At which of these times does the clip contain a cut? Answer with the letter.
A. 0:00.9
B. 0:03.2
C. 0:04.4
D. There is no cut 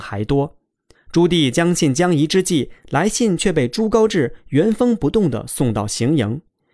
A